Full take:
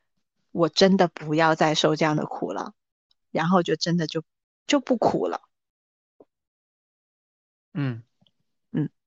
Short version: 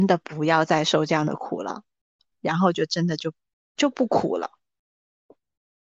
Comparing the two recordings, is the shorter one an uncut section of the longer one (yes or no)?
yes